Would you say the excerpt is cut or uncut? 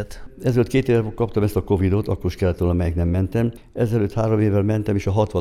uncut